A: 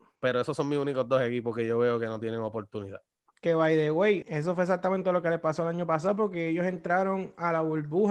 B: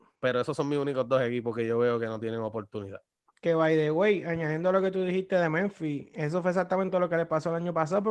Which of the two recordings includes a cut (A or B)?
A